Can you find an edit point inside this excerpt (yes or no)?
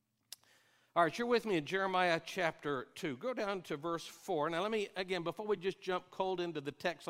no